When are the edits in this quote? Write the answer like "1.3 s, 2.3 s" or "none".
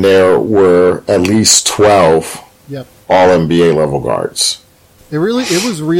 5.0 s